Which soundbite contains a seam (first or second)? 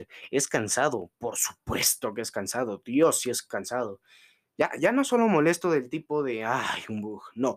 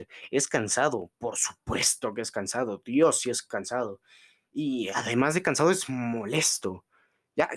first